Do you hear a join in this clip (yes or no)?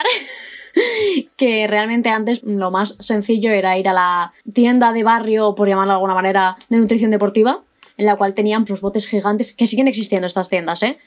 yes